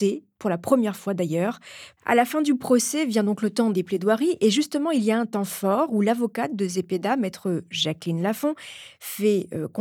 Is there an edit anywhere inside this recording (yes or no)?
yes